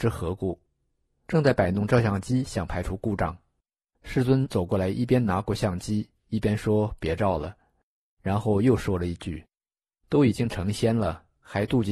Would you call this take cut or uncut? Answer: uncut